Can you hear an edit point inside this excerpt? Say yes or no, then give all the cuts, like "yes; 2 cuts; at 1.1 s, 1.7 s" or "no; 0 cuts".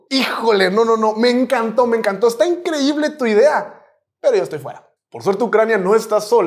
no; 0 cuts